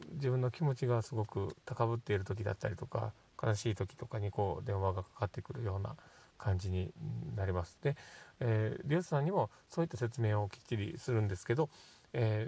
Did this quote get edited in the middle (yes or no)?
no